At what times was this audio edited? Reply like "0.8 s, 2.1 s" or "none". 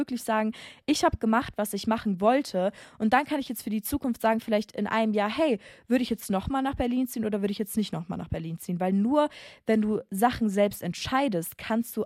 none